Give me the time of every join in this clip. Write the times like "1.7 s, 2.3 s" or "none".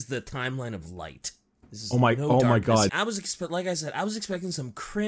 2.9 s